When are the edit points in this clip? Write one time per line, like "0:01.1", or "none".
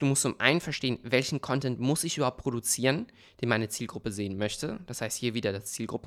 none